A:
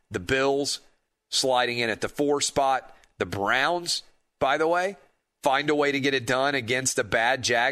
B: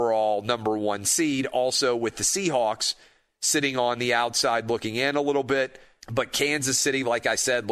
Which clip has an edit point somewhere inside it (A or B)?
B